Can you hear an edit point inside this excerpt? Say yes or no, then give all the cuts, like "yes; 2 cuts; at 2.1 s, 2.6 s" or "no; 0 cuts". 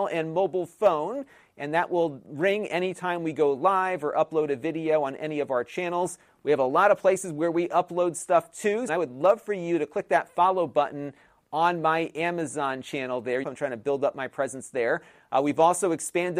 yes; 2 cuts; at 8.9 s, 13.4 s